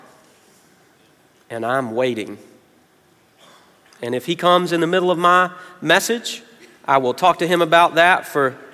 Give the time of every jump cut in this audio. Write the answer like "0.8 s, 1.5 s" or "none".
none